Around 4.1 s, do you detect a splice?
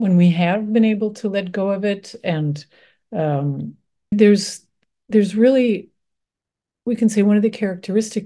yes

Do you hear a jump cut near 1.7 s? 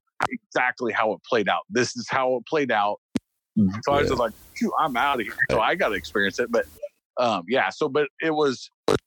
no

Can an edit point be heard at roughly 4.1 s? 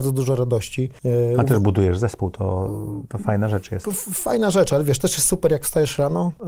no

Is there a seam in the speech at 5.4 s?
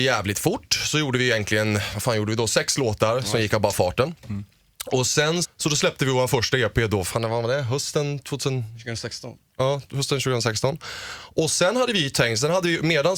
yes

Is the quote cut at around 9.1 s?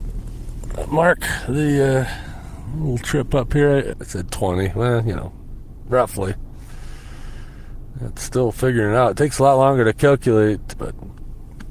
no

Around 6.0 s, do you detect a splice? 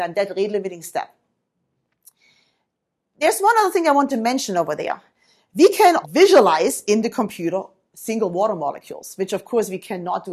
yes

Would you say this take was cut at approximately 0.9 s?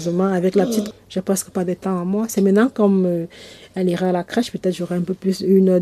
yes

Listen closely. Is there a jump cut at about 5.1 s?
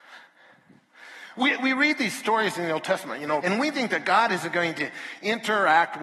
no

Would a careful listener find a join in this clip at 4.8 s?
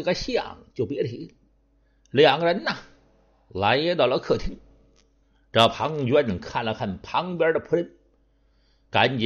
no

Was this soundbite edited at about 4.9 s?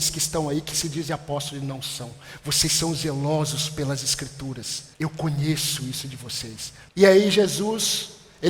yes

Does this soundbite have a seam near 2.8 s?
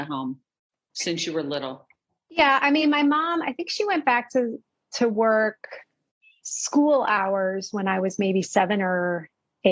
no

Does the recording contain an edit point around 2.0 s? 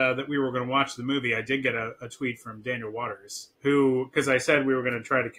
no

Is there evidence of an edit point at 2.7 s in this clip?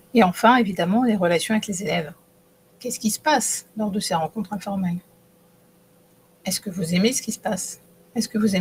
yes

